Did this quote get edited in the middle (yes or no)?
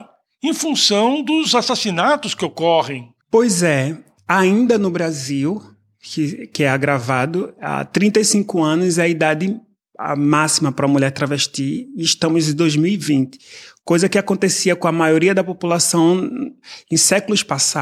yes